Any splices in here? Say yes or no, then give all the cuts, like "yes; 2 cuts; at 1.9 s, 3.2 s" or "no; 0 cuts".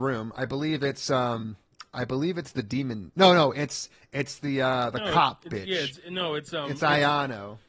no; 0 cuts